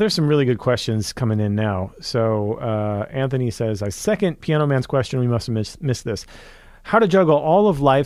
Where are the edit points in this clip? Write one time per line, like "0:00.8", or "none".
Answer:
none